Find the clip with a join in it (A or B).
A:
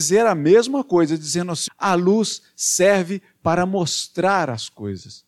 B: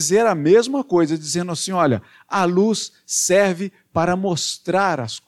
A